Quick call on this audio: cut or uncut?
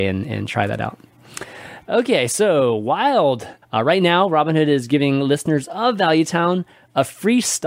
cut